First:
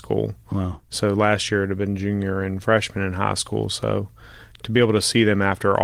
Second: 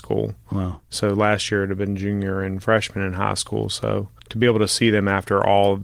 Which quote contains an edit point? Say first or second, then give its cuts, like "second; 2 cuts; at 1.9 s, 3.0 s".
second; 1 cut; at 4.2 s